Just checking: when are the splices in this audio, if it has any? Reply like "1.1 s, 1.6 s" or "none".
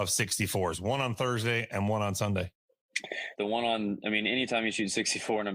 3.4 s